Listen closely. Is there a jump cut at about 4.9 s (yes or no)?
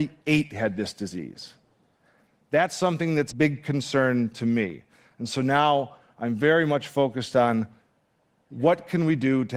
no